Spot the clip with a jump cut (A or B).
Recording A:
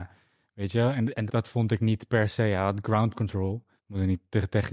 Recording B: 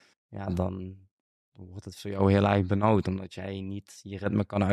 A